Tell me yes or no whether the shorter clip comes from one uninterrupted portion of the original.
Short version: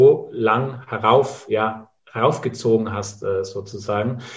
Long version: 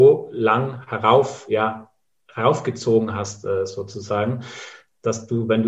no